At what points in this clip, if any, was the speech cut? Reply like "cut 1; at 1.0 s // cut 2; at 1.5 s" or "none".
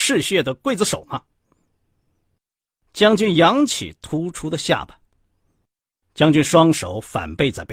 cut 1; at 6.0 s